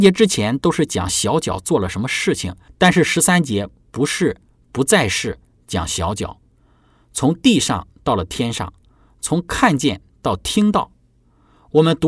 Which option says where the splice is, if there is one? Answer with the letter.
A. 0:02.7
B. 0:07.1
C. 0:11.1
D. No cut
A